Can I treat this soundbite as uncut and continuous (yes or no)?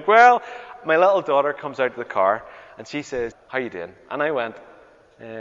no